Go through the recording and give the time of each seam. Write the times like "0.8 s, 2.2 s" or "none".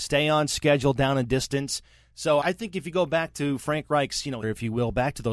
2.4 s, 4.4 s